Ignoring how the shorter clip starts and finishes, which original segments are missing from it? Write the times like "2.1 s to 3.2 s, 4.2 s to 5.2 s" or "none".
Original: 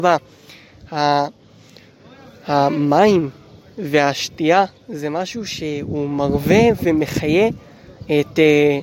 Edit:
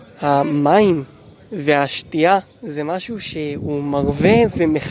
none